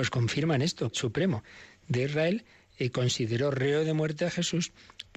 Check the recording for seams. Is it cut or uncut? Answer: cut